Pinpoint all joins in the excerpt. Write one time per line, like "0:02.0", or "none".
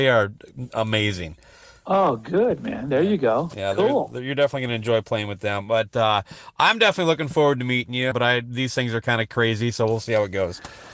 0:08.1